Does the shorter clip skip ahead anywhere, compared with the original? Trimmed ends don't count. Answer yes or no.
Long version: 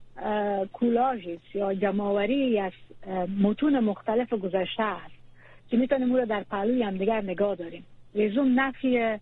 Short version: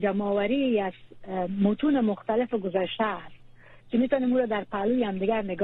no